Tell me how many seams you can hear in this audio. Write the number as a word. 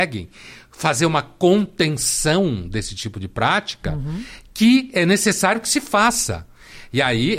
zero